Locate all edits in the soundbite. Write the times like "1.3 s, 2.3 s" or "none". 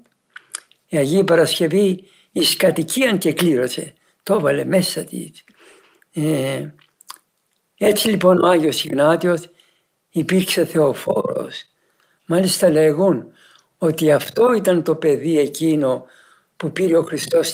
none